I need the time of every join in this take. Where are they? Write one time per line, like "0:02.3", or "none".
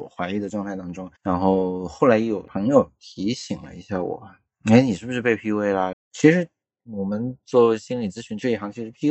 0:01.2
0:05.9